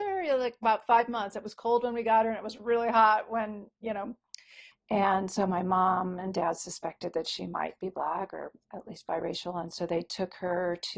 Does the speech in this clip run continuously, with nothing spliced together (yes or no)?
no